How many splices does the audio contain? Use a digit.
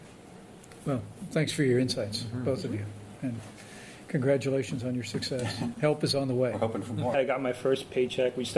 2